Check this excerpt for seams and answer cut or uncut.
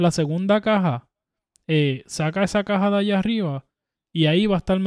uncut